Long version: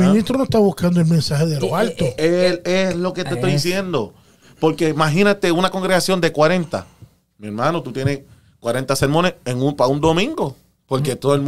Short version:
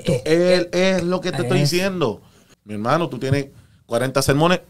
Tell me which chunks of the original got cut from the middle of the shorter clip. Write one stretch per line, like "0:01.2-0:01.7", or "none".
0:04.5-0:07.3